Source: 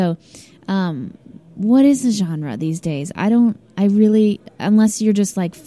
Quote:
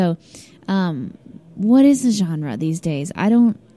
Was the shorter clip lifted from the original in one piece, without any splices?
yes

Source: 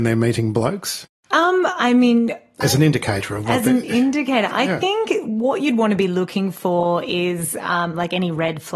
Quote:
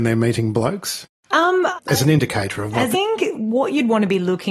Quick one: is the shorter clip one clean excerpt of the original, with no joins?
no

